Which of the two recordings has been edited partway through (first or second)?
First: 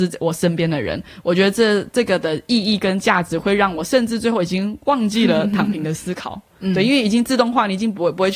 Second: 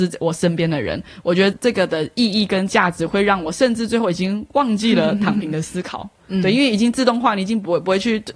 second